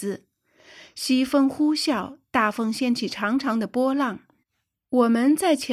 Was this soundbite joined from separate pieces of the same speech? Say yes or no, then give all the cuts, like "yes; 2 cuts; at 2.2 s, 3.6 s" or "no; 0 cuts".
no; 0 cuts